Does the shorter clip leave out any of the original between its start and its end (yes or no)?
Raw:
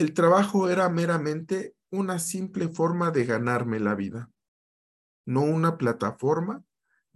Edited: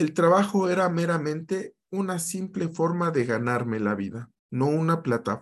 yes